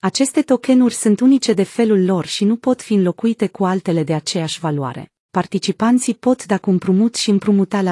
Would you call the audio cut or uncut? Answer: cut